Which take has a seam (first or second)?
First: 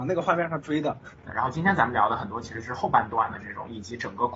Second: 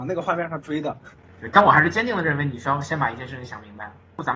first